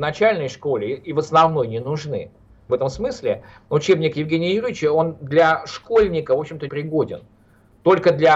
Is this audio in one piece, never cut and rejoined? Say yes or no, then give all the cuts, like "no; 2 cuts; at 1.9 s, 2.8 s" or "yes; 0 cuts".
no; 2 cuts; at 2.7 s, 6.7 s